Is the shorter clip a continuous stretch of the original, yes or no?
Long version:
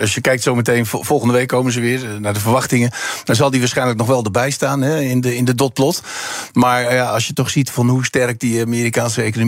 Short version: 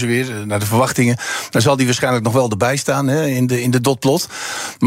yes